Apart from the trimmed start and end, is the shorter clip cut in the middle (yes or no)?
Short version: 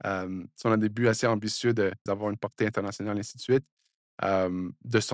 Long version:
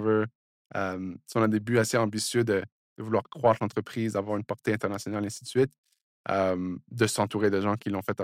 yes